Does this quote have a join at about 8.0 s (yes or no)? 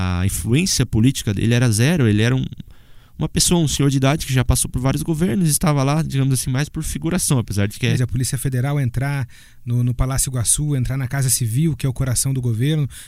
yes